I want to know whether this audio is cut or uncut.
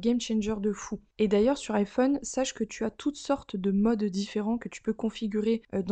uncut